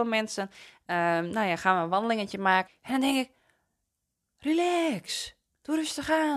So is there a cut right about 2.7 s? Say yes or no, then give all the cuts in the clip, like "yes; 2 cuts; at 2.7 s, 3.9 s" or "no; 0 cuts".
yes; 1 cut; at 2.7 s